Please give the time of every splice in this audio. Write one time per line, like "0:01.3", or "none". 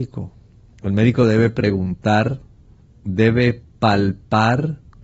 none